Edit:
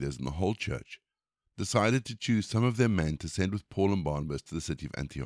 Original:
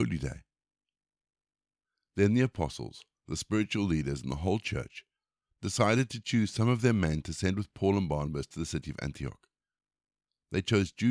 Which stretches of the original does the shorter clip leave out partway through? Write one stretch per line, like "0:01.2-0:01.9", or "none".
none